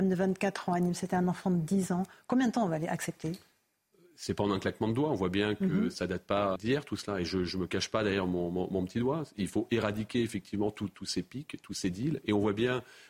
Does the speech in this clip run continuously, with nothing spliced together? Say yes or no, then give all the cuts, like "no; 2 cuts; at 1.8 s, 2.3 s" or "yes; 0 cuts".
no; 1 cut; at 6.6 s